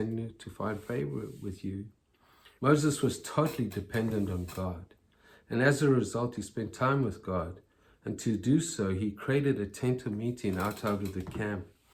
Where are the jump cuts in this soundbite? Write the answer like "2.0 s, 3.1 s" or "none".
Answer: 2.6 s